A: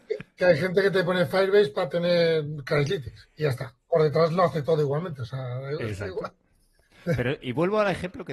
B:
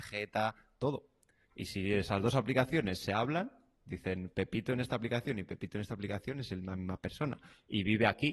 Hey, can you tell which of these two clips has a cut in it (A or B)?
A